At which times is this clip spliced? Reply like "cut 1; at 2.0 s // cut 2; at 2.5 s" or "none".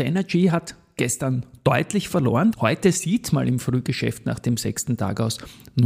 cut 1; at 2.5 s